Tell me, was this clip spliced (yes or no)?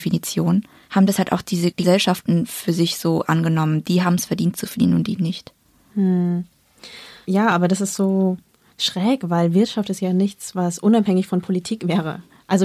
no